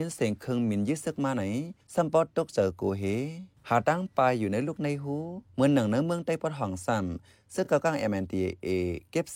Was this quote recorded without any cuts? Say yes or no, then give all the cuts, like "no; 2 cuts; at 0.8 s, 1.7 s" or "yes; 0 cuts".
yes; 0 cuts